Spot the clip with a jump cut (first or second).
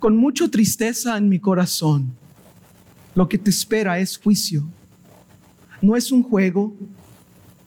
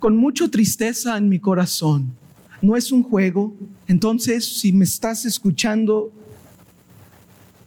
second